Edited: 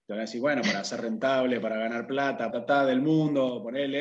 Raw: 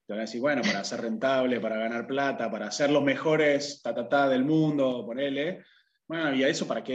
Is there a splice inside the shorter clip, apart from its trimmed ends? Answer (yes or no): yes